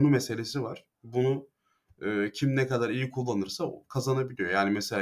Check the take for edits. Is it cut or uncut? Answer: uncut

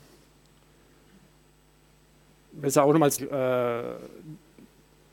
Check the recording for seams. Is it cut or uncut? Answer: cut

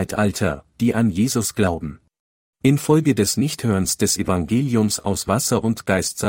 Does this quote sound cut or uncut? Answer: cut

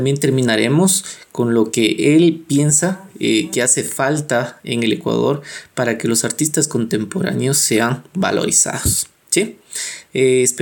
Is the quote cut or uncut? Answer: uncut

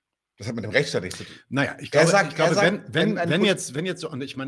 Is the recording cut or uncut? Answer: uncut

